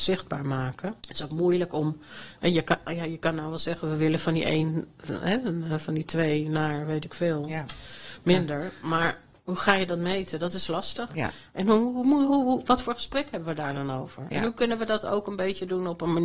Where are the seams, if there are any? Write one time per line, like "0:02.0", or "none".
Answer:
0:01.0
0:11.1
0:12.3